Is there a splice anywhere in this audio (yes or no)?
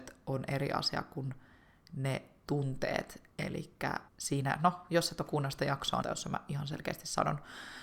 yes